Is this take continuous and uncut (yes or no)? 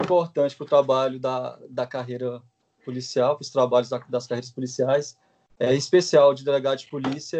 yes